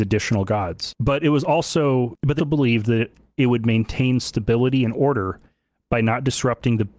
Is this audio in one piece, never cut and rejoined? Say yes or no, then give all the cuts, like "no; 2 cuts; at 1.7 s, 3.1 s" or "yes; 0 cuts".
no; 1 cut; at 2.4 s